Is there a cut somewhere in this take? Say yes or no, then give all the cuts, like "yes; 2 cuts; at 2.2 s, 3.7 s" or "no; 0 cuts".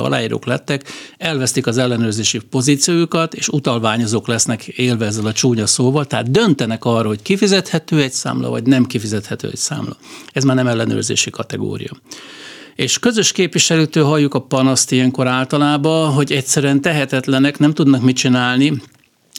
no; 0 cuts